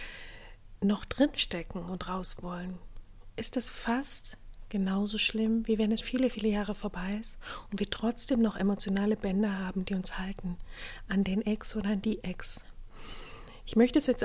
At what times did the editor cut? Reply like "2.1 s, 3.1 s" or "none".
6.0 s